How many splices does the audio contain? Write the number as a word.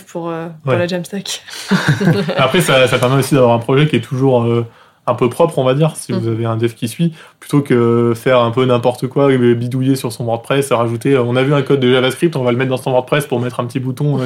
zero